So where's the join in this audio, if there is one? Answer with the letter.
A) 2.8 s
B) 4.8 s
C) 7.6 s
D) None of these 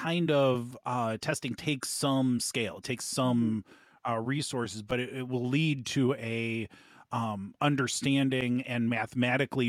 D